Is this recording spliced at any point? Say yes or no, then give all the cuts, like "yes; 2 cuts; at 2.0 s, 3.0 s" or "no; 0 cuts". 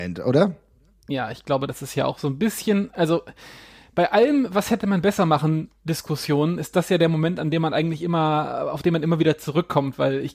no; 0 cuts